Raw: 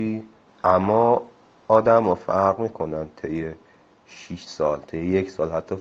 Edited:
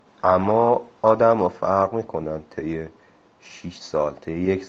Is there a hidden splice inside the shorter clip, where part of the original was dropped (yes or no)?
yes